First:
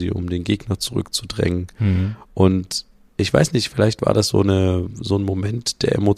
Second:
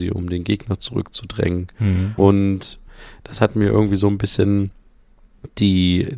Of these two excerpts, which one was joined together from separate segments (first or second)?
second